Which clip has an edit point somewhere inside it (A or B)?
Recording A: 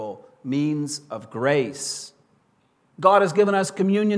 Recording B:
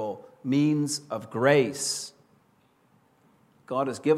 A